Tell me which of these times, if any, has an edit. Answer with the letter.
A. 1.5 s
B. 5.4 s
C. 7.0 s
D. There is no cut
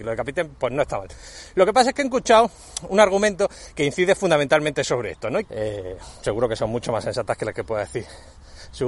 B